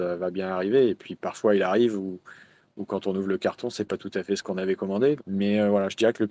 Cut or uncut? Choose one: cut